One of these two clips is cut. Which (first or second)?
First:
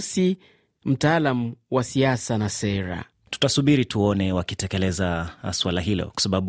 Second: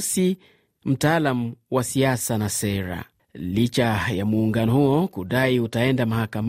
second